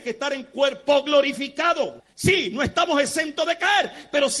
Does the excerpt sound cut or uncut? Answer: cut